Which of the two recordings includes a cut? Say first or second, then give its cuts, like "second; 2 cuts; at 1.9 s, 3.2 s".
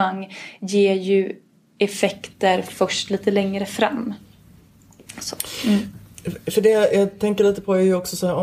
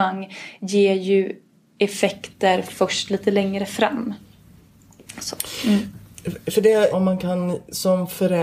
second; 1 cut; at 6.9 s